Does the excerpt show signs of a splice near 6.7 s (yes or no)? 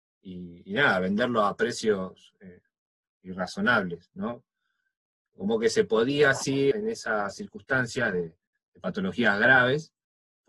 yes